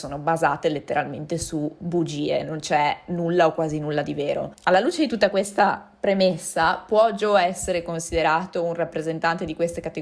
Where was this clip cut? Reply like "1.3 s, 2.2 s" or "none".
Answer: 4.5 s